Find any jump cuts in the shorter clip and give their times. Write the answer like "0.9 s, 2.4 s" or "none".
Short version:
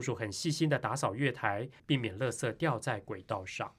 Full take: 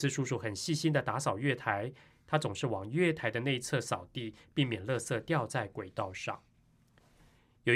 1.8 s